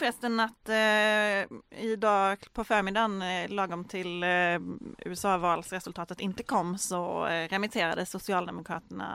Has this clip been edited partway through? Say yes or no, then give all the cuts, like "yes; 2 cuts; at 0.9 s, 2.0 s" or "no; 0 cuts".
no; 0 cuts